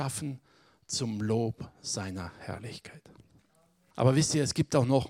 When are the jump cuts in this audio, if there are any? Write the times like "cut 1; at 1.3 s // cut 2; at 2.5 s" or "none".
cut 1; at 3.9 s